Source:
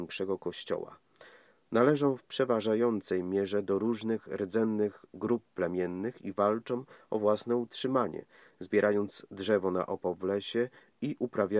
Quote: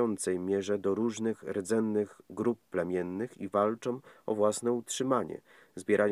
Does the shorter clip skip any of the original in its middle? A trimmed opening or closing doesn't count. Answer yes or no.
no